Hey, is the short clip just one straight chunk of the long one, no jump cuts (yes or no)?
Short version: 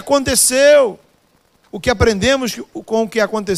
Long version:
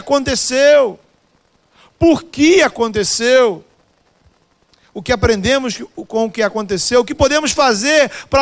no